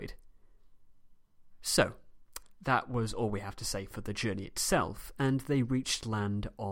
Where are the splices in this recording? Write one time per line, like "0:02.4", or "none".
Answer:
none